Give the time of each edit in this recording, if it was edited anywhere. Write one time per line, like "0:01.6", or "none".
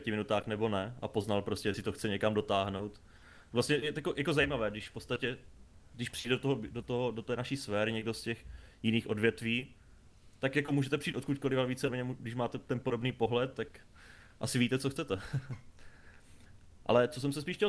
none